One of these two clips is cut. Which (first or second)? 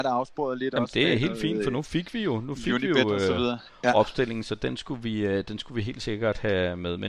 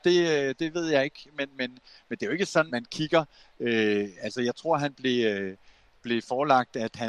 second